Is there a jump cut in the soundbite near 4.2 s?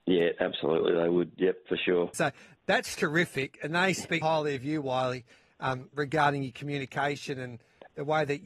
yes; 2 cuts; at 2.1 s, 4.2 s

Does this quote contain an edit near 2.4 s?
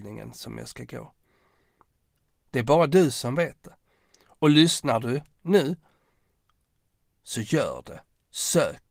yes; 1 cut; at 2.4 s

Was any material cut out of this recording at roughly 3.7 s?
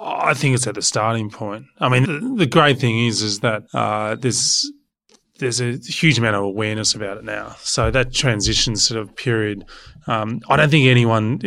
yes; 2 cuts; at 2.0 s, 3.7 s

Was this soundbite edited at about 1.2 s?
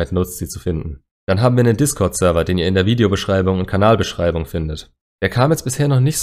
no; 0 cuts

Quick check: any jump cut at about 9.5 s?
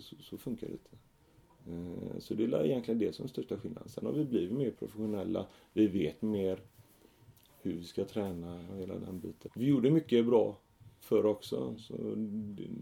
yes; 1 cut; at 9.5 s

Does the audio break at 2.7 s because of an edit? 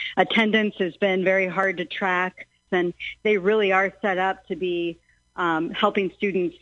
yes; 1 cut; at 2.7 s

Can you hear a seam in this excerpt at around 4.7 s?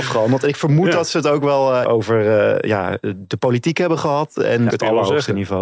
yes; 2 cuts; at 1.8 s, 4.7 s

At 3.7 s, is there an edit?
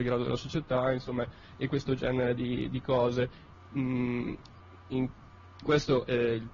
yes; 2 cuts; at 3.7 s, 5.6 s

